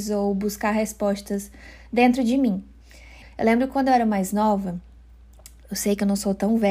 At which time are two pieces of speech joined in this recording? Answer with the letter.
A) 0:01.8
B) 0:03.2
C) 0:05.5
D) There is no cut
B